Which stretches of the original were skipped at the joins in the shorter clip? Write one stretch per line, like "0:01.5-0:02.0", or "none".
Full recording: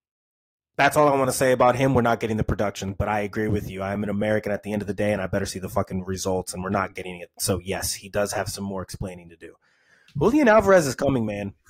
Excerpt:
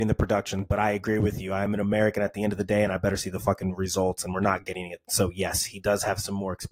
none